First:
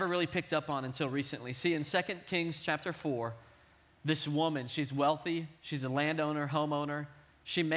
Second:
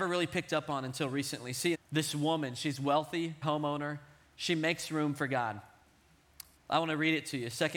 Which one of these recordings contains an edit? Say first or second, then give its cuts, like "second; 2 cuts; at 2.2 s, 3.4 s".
second; 3 cuts; at 1.7 s, 3.4 s, 6.6 s